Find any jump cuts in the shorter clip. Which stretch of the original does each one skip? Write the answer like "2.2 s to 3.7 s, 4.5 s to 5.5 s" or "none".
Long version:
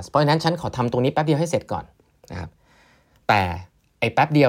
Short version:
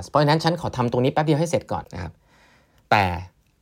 1.8 s to 2.2 s